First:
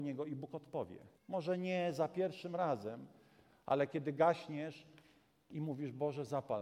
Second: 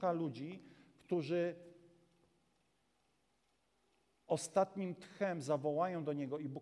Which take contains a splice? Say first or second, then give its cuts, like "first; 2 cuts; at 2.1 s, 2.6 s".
first; 1 cut; at 1.2 s